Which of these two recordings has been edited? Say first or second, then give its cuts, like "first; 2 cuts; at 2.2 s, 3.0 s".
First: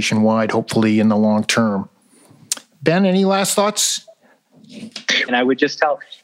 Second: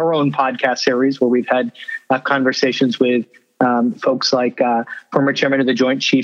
first; 1 cut; at 5.3 s